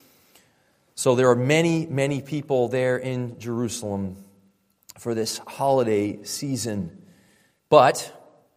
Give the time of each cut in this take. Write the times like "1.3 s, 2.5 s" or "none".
none